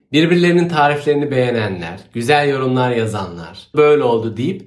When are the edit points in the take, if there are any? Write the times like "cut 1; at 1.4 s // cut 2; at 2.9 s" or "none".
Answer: cut 1; at 3.7 s